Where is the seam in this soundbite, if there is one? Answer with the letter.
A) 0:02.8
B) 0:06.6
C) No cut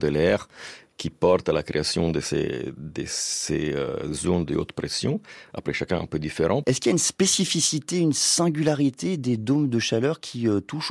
B